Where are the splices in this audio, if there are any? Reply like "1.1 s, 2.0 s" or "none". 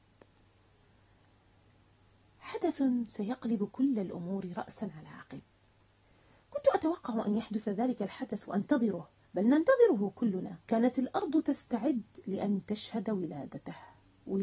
10.6 s